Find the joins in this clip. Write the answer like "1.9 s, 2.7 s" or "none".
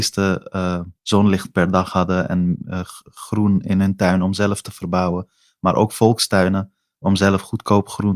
1.0 s